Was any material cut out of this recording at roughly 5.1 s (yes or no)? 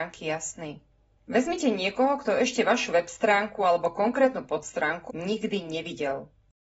yes